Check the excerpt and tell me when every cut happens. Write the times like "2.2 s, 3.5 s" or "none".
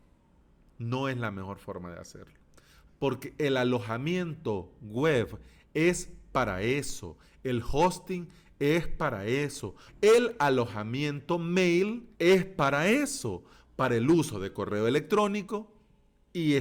2.9 s, 9.9 s, 12.1 s